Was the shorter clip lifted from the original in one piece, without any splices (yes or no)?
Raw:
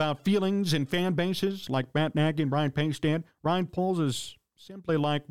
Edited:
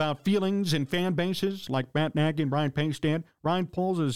yes